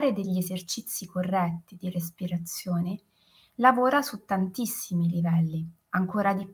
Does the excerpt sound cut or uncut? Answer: uncut